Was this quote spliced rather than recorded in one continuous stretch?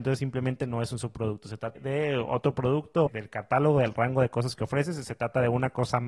yes; 2 cuts; at 1.8 s, 3.1 s

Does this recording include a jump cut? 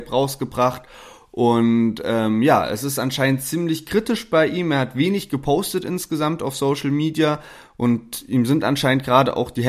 no; 0 cuts

